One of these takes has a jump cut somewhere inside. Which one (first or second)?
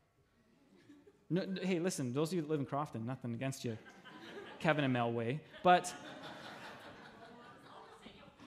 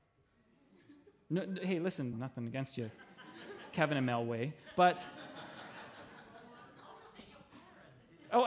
second